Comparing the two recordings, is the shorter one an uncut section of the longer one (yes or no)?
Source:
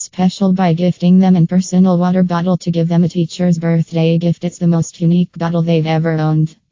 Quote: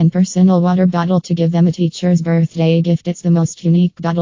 yes